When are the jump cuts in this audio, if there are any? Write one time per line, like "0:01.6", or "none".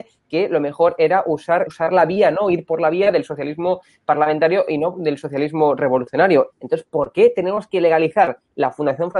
0:01.7
0:06.5

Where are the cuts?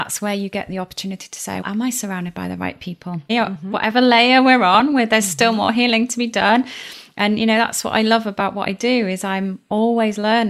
0:01.6
0:03.3

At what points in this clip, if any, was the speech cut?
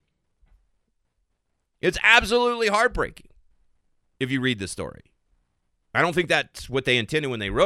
none

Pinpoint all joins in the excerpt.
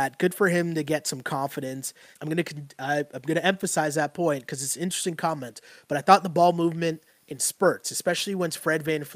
0:02.1

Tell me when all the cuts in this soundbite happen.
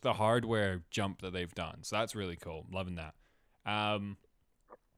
none

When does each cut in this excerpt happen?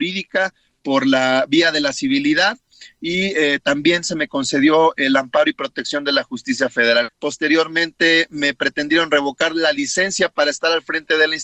0:07.1

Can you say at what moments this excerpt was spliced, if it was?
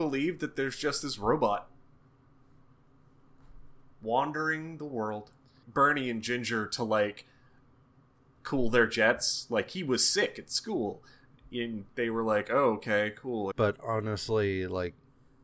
0:05.6
0:13.5

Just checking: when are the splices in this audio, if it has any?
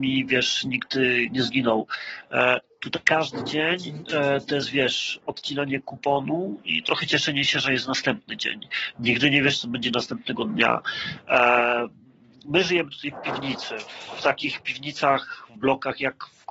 none

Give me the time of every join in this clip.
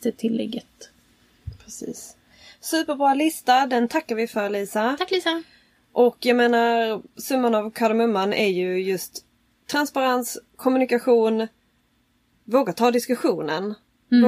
none

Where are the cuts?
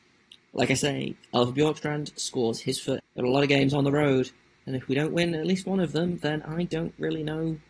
0:03.0

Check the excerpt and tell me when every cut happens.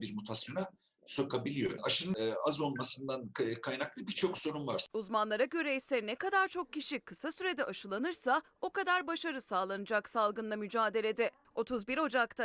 0:01.8
0:04.9

